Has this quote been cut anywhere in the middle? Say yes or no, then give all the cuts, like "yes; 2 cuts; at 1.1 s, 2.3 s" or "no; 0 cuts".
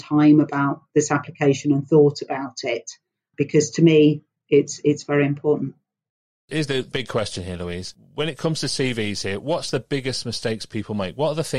no; 0 cuts